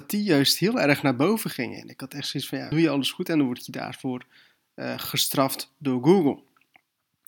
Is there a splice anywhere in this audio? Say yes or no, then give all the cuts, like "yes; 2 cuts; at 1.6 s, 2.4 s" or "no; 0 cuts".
yes; 1 cut; at 2.7 s